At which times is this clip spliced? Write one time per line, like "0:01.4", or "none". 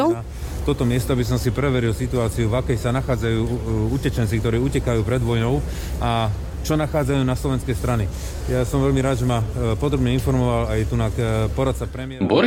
none